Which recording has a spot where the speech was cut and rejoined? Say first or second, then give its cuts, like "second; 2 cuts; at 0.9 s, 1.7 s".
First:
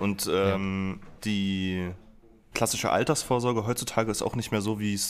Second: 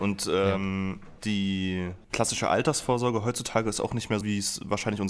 second; 2 cuts; at 2.0 s, 4.2 s